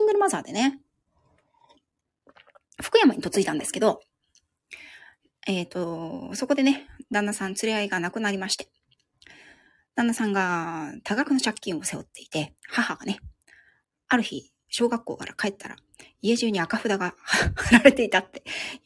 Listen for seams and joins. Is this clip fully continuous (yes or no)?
yes